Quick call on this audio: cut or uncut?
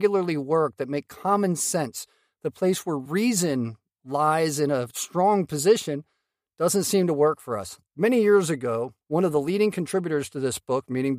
cut